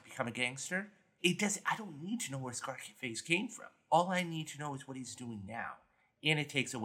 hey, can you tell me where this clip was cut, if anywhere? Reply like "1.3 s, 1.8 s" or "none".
1.2 s

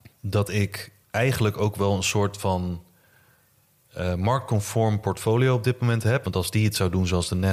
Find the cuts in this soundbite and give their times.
1.0 s, 6.2 s

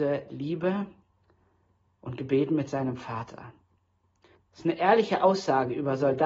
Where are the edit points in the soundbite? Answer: 4.4 s

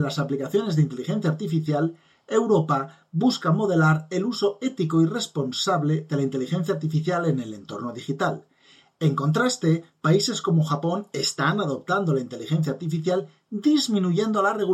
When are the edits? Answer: none

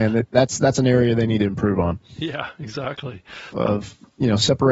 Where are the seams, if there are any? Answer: 3.5 s

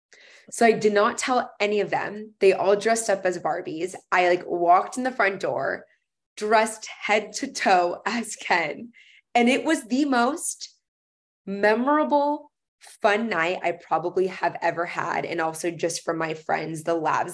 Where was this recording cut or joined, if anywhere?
none

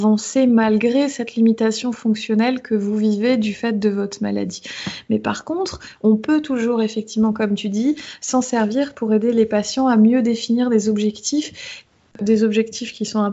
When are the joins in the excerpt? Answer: 6.0 s

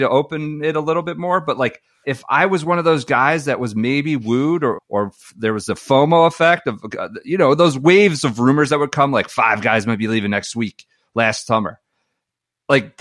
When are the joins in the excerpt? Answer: 2.0 s, 4.8 s

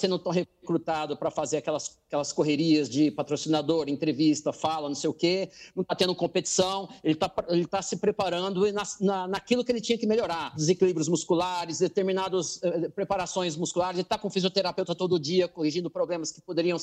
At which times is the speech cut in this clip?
10.5 s

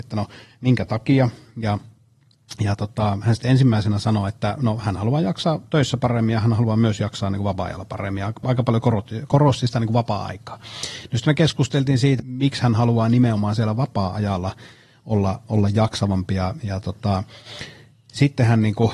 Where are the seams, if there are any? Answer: 12.2 s

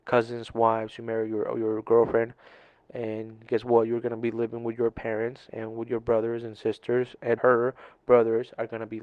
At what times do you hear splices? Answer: 7.4 s

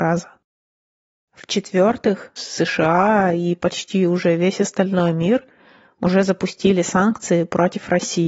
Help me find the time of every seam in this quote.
1.2 s, 2.4 s

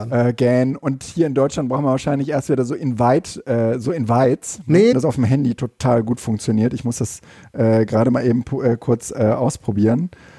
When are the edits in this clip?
4.9 s

